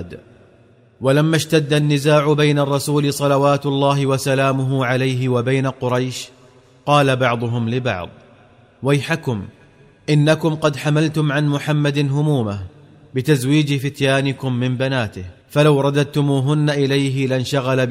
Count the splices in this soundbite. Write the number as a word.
one